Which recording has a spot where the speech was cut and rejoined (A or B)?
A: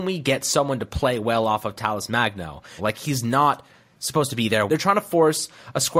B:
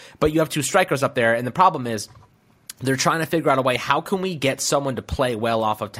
A